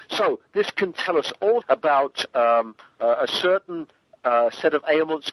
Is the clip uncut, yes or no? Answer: no